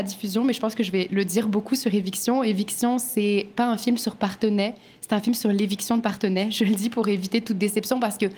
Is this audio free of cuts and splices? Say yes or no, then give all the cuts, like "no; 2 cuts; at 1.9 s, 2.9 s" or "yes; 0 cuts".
yes; 0 cuts